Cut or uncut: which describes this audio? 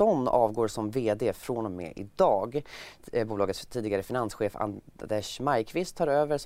uncut